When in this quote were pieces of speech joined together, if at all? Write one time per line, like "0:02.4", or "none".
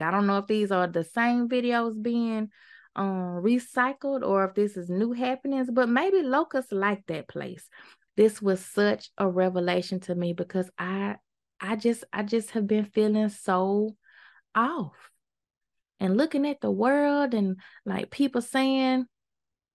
0:08.1